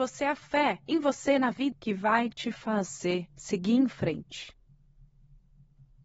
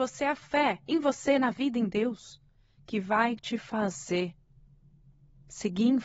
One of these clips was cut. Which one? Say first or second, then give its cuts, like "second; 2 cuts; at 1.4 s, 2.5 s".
first; 2 cuts; at 1.7 s, 3.3 s